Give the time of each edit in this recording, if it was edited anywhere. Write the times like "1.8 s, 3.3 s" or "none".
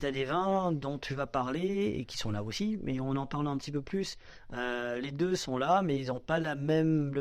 none